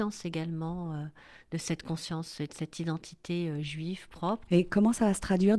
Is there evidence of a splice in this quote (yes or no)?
yes